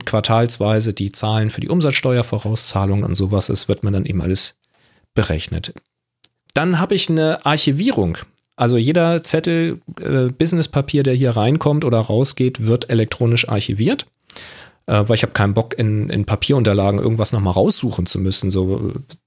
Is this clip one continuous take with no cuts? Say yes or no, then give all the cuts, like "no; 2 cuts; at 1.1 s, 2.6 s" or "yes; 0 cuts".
no; 1 cut; at 6.5 s